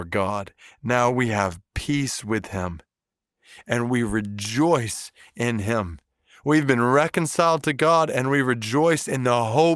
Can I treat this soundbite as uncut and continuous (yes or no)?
yes